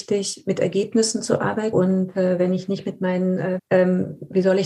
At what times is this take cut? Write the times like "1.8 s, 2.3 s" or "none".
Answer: 1.7 s, 3.6 s